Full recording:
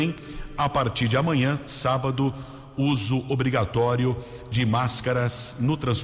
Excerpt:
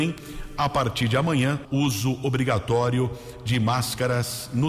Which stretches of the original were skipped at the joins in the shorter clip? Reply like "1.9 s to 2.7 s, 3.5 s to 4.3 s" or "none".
1.6 s to 2.7 s